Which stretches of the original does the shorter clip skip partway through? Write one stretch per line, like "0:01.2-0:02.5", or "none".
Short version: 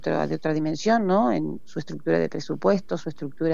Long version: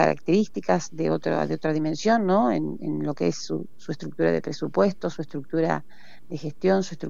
0:02.8-0:03.7